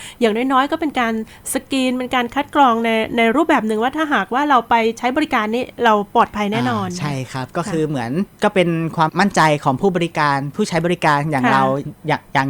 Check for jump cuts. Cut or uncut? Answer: cut